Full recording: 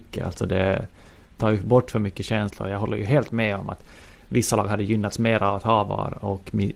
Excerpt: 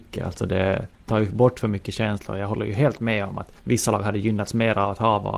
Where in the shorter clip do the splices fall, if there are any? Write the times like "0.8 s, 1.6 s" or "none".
0.9 s, 3.6 s